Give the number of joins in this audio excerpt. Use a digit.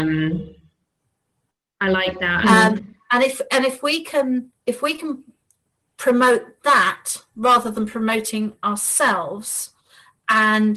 2